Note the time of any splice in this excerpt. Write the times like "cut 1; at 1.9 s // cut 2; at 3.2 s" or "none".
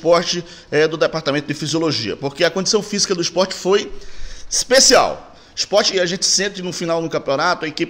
cut 1; at 5.9 s